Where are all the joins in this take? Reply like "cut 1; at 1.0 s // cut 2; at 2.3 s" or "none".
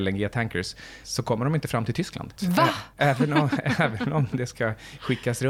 cut 1; at 1.0 s // cut 2; at 2.4 s